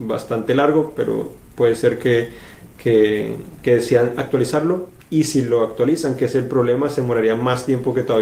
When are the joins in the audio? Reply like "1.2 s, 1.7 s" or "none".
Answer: none